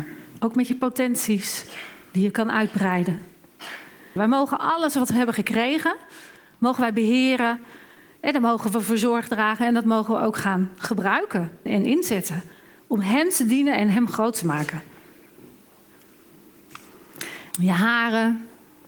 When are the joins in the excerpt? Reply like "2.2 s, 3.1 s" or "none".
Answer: 4.2 s, 11.7 s, 17.5 s